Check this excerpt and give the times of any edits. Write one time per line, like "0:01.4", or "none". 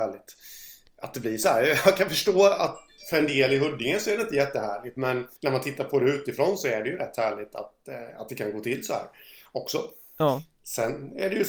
0:05.4